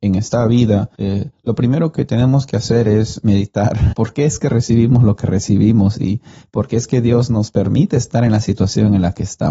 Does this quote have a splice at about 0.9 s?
yes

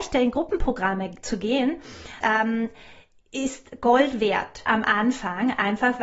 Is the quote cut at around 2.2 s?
yes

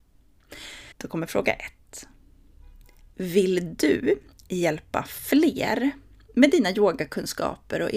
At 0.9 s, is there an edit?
yes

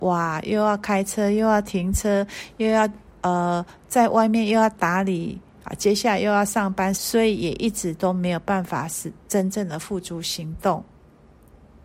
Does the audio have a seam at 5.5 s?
no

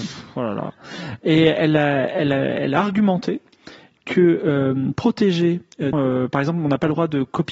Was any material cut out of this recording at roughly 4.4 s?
no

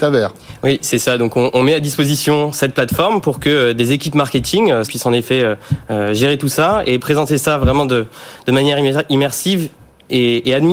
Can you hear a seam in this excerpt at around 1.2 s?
no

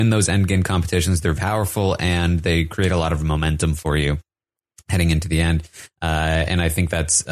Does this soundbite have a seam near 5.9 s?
no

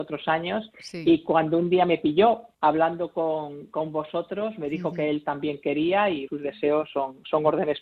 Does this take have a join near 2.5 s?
yes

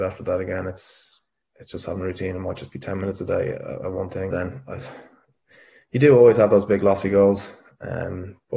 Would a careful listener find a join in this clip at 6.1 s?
no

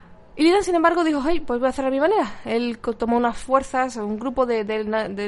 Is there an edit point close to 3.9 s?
no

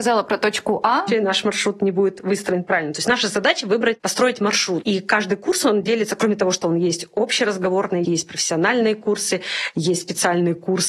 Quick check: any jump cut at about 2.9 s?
no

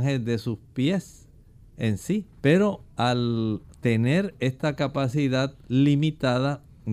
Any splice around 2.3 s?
yes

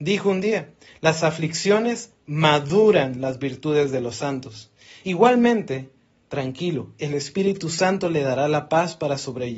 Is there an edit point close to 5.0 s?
yes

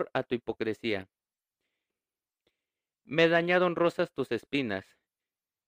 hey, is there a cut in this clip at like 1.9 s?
yes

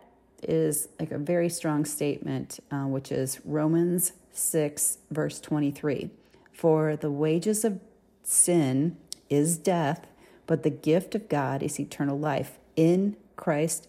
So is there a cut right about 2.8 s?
no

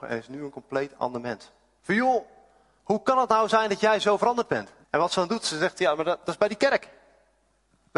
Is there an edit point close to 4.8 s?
yes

